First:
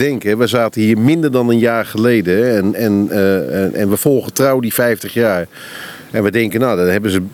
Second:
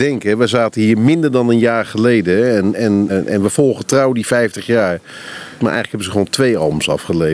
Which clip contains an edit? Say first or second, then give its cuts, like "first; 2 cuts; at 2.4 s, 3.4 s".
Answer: second; 2 cuts; at 3.1 s, 5.6 s